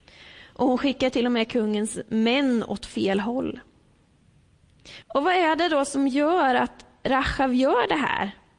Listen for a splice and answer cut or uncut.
cut